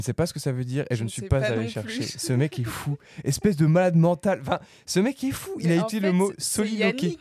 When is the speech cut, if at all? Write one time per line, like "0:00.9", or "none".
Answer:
none